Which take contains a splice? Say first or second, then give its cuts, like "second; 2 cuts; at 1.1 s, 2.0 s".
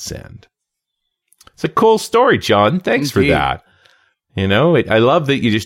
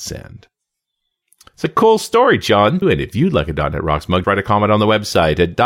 second; 2 cuts; at 2.8 s, 4.2 s